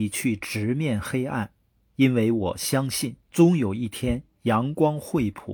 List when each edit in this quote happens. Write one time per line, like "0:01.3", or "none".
0:03.2